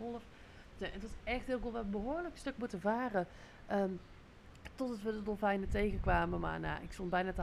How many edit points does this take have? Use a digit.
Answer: 0